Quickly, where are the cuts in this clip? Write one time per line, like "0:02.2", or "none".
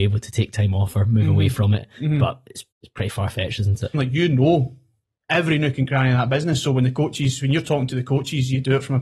0:02.7
0:03.9